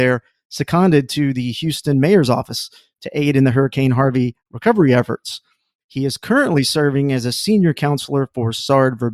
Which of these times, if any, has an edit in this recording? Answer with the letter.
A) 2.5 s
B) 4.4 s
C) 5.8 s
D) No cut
C